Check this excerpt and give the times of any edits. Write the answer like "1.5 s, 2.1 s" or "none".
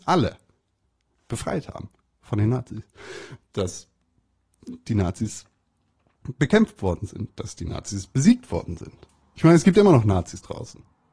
none